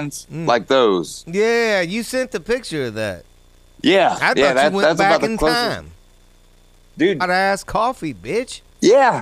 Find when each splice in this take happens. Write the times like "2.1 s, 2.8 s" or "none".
7.2 s